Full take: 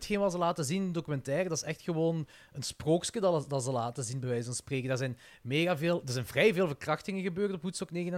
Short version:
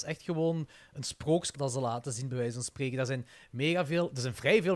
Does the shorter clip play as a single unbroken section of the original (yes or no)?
no